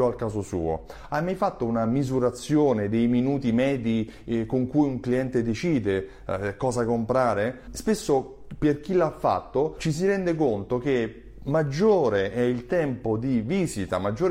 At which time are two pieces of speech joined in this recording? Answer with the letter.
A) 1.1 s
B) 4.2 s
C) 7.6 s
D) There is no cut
D